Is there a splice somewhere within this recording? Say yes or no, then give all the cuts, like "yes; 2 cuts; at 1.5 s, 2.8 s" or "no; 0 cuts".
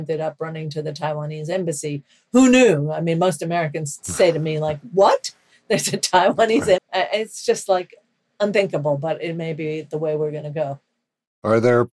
yes; 1 cut; at 6.8 s